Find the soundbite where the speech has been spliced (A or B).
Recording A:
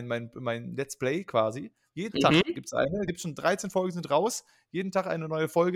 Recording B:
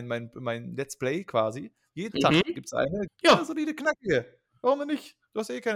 B